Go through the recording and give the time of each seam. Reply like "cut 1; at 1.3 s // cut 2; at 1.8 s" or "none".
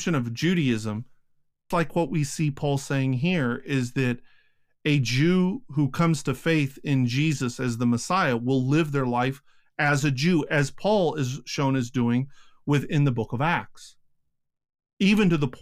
cut 1; at 1.7 s